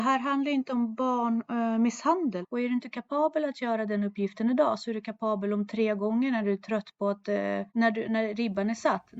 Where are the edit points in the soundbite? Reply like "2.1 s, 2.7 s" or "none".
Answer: 2.4 s, 7.7 s